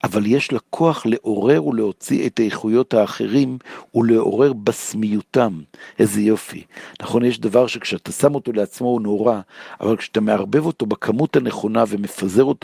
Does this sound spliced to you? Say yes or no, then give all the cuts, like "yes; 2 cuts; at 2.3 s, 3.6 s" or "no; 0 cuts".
no; 0 cuts